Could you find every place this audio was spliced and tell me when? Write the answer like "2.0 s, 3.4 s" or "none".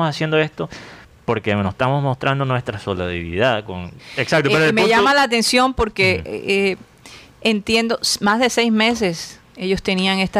4.0 s